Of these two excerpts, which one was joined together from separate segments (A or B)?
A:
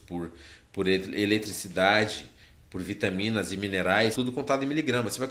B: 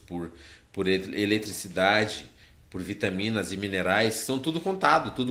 A